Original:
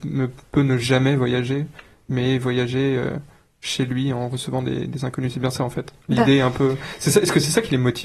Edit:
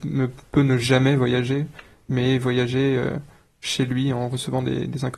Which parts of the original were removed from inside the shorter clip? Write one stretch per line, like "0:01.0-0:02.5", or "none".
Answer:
none